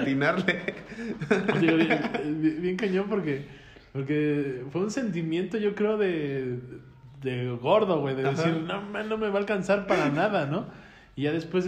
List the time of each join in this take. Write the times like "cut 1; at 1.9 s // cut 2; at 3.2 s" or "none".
none